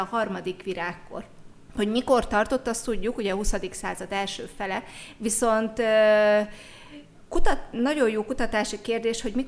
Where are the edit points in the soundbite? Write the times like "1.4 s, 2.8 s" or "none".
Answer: none